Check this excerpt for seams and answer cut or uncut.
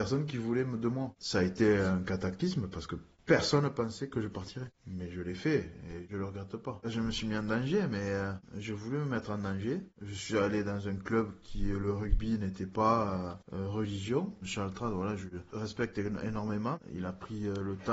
uncut